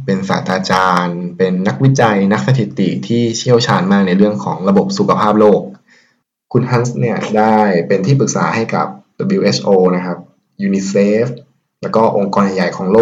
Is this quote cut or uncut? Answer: uncut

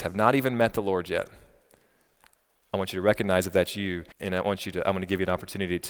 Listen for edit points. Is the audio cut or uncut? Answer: cut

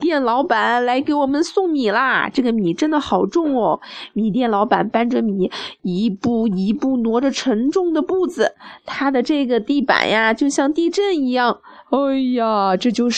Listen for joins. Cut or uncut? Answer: uncut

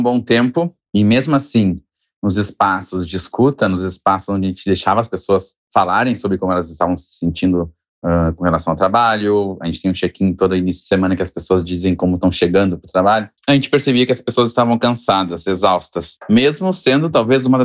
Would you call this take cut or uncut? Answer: cut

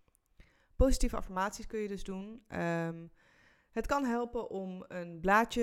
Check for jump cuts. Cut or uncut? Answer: uncut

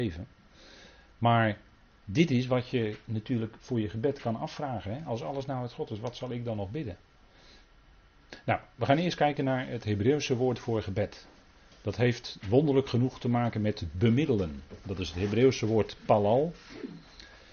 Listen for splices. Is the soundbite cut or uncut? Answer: uncut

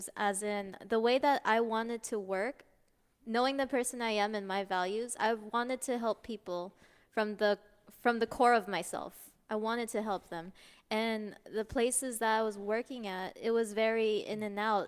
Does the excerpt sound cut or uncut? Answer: uncut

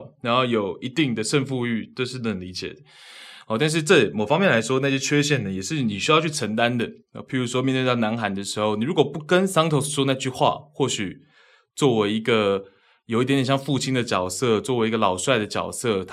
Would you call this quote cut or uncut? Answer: uncut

